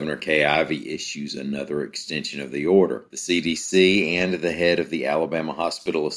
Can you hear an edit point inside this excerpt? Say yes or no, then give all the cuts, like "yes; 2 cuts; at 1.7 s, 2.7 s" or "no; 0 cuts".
yes; 1 cut; at 3.1 s